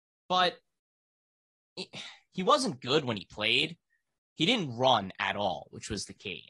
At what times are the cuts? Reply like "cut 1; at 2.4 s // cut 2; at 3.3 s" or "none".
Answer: none